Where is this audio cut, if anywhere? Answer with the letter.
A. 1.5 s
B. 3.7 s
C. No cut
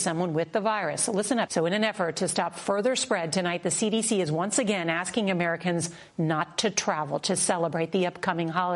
A